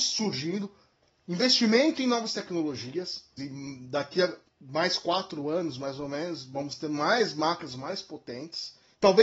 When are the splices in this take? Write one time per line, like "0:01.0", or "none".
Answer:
0:03.4

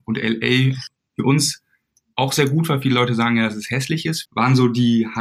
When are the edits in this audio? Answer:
0:04.3

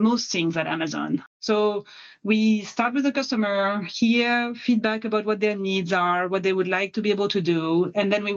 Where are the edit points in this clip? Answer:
0:01.3

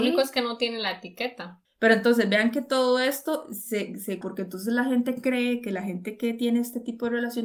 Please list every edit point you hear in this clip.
0:01.6
0:04.2

